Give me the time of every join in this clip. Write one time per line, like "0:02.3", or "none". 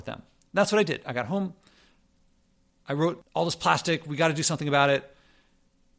0:01.0